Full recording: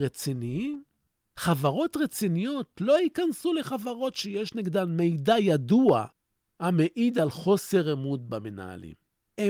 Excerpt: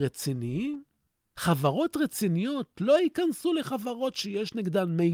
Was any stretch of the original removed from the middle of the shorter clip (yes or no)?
no